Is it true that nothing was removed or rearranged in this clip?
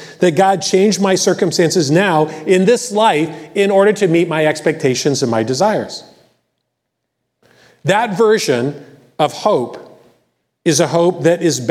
no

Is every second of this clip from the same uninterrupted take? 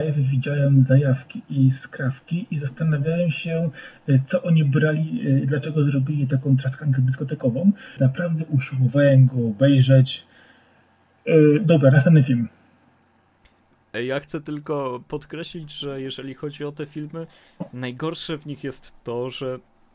no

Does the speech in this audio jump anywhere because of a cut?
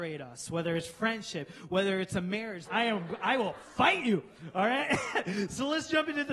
yes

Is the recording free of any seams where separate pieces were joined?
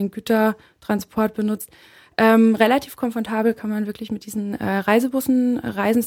yes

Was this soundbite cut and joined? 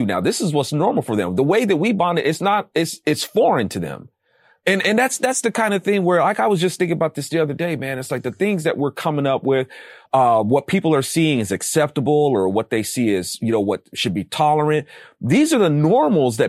no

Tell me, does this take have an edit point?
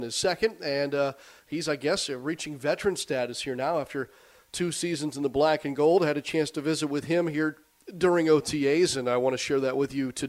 no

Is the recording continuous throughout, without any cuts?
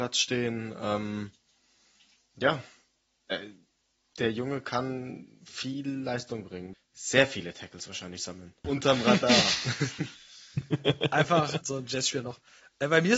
no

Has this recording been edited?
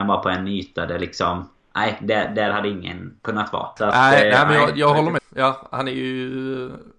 yes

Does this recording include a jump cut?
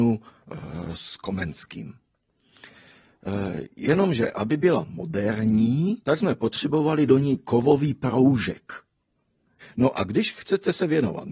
yes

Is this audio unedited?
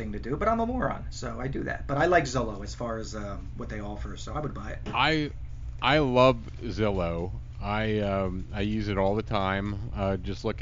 yes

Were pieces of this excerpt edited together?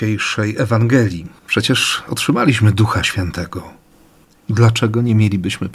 yes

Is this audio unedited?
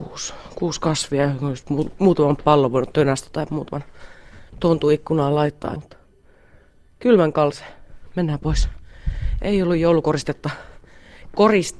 no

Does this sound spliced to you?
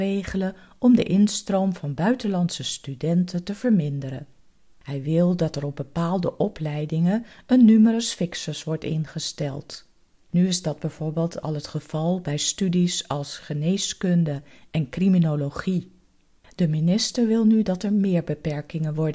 yes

